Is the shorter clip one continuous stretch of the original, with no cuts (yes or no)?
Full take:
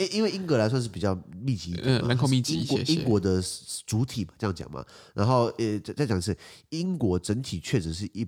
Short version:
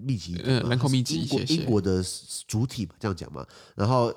yes